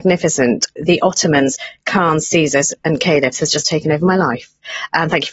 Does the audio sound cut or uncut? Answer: uncut